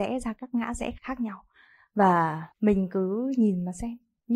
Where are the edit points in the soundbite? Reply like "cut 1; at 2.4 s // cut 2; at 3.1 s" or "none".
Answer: cut 1; at 1.0 s // cut 2; at 2.5 s

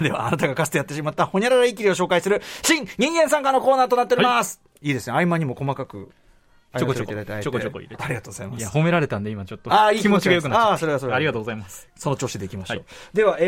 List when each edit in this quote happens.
none

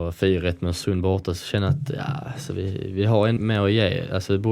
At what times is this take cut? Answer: cut 1; at 3.4 s

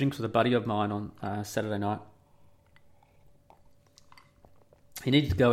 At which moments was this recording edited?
none

